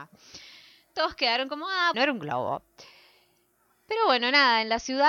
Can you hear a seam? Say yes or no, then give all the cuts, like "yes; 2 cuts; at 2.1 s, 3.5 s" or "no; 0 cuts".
yes; 1 cut; at 1.9 s